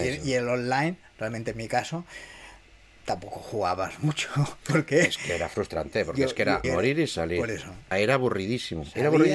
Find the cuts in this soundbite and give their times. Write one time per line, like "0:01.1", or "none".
0:06.6
0:07.9